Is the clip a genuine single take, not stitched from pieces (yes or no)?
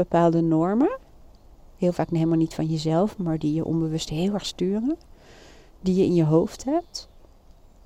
yes